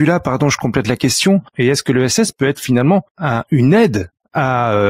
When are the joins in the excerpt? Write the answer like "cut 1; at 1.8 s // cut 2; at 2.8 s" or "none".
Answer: cut 1; at 1.5 s // cut 2; at 3.1 s